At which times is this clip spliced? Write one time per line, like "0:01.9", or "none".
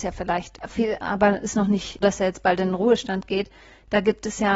0:01.0
0:02.0